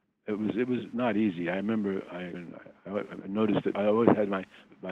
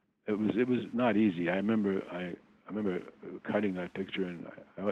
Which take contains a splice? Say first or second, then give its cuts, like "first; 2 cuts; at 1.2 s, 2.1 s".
first; 1 cut; at 2.3 s